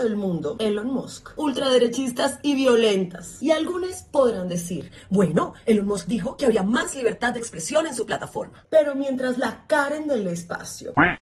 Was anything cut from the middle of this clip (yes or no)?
yes